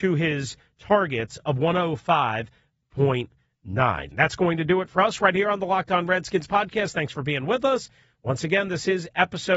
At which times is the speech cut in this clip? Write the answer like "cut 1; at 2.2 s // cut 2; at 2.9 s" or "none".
cut 1; at 4.1 s